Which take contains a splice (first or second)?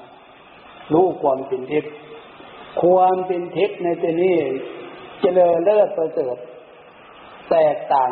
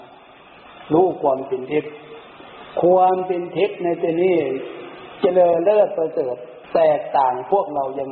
second